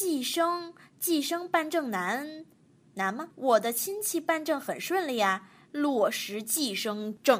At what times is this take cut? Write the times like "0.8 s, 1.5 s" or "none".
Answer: none